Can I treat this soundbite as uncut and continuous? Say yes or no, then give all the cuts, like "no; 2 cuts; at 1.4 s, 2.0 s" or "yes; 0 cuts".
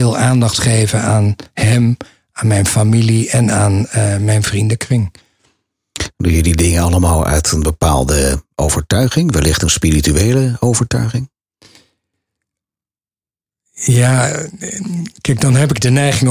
yes; 0 cuts